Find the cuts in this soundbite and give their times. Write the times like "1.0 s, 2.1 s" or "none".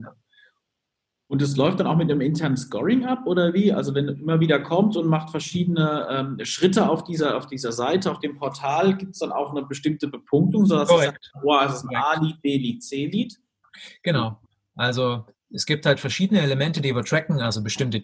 none